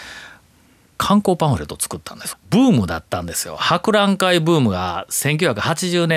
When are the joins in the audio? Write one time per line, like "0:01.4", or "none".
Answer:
0:02.3